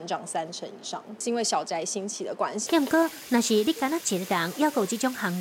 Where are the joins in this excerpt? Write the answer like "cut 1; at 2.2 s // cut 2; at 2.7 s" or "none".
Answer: cut 1; at 2.7 s